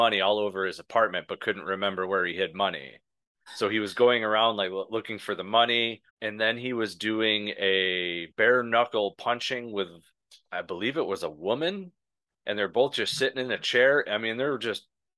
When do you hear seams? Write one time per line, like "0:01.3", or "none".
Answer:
0:06.1
0:08.3

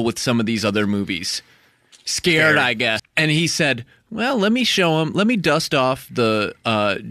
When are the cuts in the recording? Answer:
0:03.0

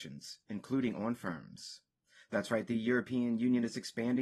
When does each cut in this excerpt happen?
none

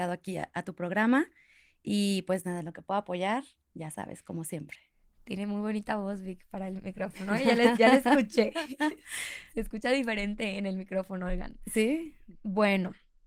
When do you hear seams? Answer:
none

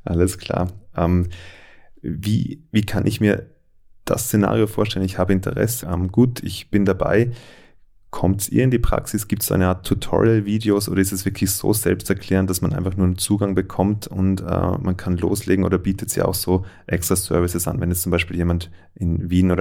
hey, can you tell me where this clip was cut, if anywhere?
0:05.8

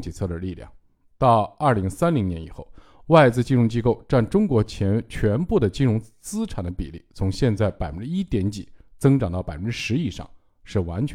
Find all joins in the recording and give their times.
none

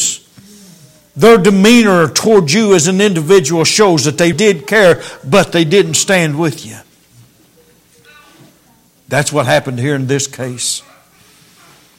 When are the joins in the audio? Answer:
0:04.3

